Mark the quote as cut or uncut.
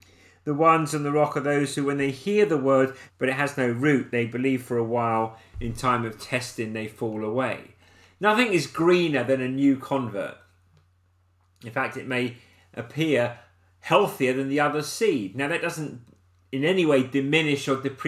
cut